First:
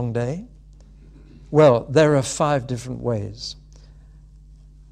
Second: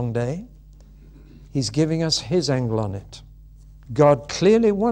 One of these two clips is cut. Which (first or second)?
second